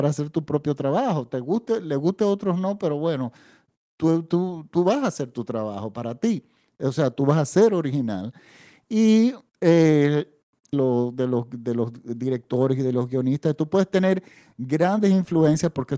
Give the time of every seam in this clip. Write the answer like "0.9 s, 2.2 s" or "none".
10.7 s